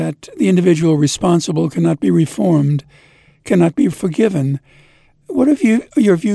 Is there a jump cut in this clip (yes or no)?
no